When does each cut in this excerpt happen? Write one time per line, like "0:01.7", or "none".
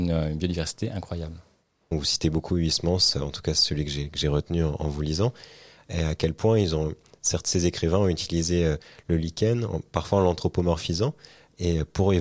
0:01.9